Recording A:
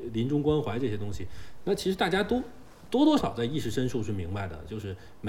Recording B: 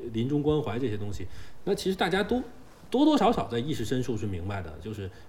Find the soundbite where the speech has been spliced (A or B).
A